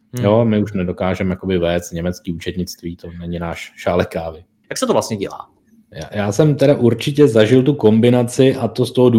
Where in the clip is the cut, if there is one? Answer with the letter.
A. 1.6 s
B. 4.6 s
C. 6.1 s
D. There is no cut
B